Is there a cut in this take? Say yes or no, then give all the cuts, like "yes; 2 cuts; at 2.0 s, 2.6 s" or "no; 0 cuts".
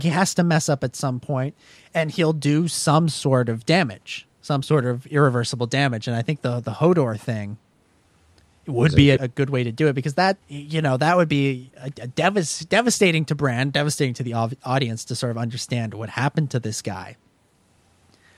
yes; 2 cuts; at 9.2 s, 10.4 s